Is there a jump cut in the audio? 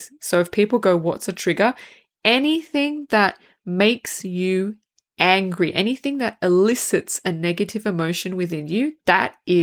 no; 0 cuts

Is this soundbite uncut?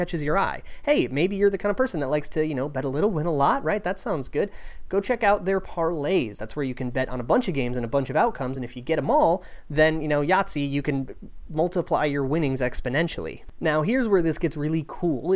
yes; 0 cuts

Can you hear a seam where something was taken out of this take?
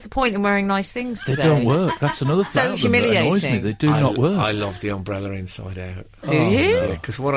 yes; 1 cut; at 2.5 s

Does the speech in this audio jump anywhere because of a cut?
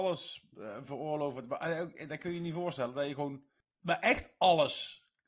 yes; 1 cut; at 3.6 s

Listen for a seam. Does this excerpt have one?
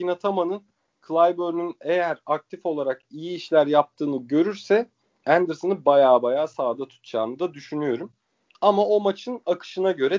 no; 0 cuts

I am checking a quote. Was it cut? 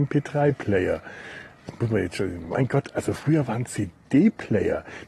no; 0 cuts

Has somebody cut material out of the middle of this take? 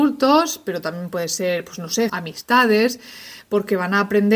yes; 1 cut; at 2.1 s

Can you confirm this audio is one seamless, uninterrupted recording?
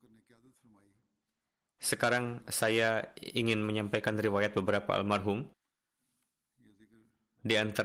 yes; 0 cuts

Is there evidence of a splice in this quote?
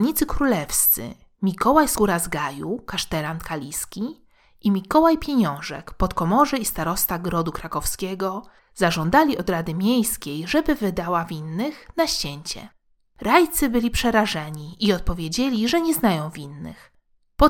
no; 0 cuts

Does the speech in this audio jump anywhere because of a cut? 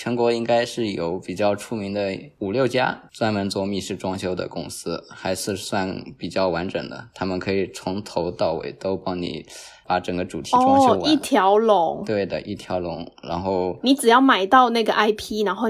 no; 0 cuts

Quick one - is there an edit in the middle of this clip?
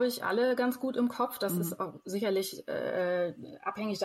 no; 0 cuts

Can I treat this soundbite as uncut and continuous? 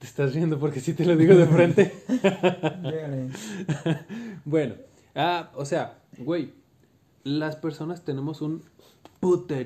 no; 1 cut; at 5.5 s

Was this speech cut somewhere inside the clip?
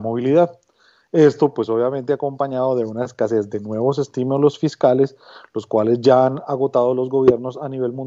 no; 0 cuts

